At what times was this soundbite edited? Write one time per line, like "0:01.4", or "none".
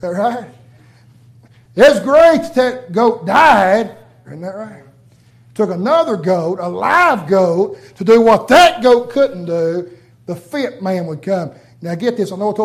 0:04.2
0:10.1